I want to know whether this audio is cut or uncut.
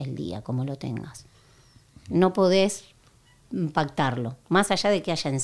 uncut